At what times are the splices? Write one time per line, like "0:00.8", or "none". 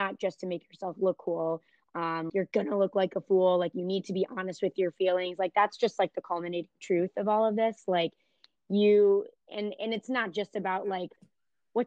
0:02.3